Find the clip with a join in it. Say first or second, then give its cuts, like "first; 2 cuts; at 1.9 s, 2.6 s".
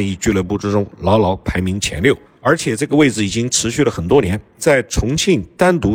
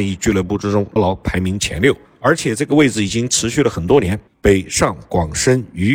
second; 2 cuts; at 1.0 s, 4.3 s